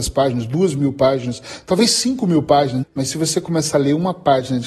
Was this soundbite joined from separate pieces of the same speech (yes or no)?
yes